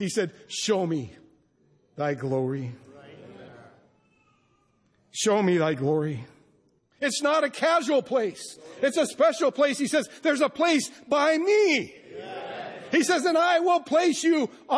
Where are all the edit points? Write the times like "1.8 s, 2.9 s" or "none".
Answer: 6.8 s